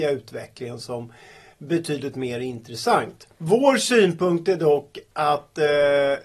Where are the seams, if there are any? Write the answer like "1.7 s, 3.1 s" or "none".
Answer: 3.3 s